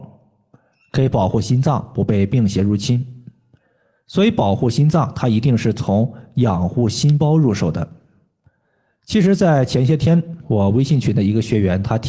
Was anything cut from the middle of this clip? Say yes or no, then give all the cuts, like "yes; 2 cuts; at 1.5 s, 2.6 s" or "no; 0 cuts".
no; 0 cuts